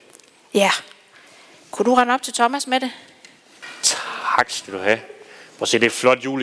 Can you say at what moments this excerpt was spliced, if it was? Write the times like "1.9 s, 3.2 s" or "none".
none